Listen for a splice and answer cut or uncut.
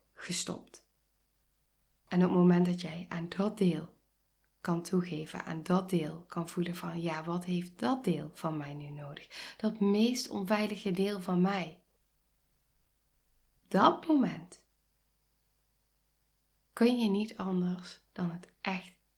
uncut